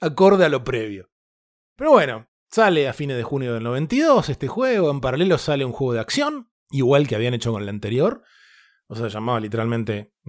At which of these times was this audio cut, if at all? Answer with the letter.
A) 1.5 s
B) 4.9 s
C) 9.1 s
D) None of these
D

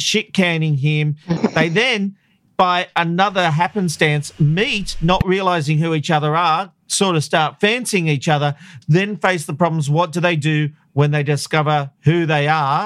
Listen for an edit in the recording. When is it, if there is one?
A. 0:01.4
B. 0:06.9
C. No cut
A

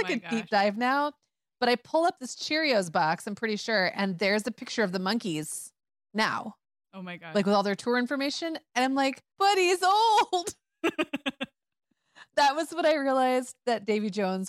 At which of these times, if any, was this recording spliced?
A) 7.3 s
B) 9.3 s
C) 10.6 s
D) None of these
B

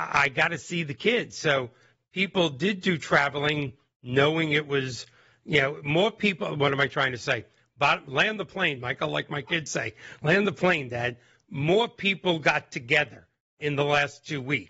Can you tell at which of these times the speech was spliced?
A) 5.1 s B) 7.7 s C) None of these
C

